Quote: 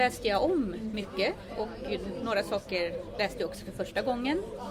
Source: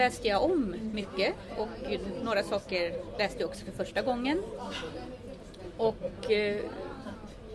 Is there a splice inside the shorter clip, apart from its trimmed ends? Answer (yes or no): no